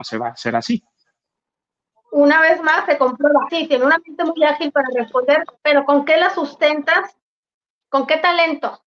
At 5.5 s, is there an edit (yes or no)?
yes